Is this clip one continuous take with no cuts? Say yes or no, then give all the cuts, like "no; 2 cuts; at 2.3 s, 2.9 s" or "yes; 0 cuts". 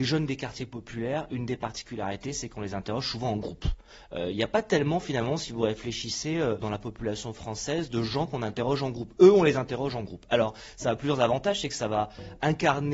yes; 0 cuts